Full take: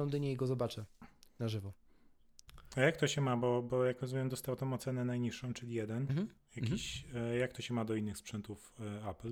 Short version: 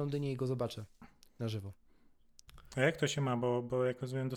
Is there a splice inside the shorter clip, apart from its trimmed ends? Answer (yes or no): no